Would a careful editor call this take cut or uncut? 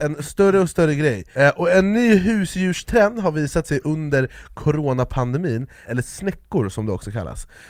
cut